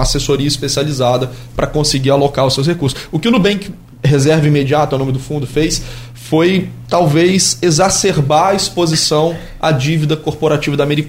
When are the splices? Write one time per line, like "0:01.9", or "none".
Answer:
none